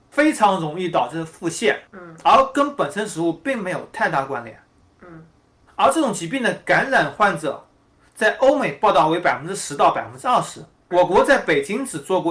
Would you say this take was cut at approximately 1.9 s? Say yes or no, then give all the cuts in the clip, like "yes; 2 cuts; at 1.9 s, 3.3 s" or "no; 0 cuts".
yes; 2 cuts; at 1.9 s, 10.9 s